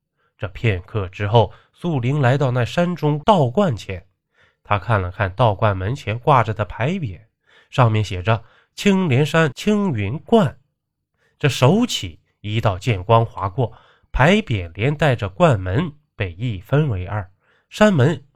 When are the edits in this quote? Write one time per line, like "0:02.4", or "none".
none